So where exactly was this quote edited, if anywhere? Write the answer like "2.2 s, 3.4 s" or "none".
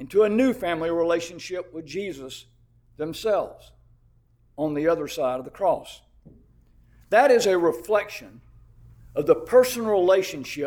none